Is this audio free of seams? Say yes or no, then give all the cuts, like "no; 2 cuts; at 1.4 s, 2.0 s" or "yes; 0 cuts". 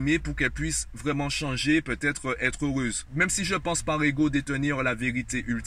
no; 1 cut; at 3.1 s